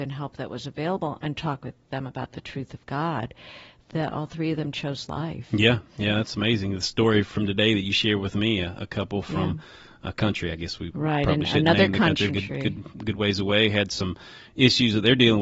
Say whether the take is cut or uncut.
cut